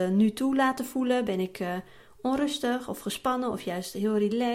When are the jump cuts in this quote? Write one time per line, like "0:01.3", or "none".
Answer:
none